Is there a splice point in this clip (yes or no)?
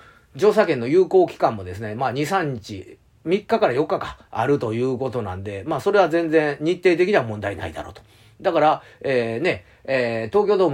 no